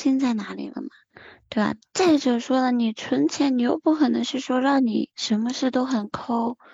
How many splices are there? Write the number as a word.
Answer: one